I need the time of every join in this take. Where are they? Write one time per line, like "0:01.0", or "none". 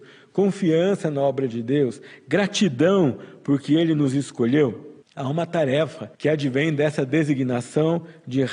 0:05.0
0:06.1